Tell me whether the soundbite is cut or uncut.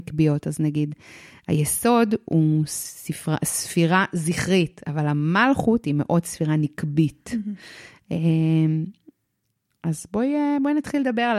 uncut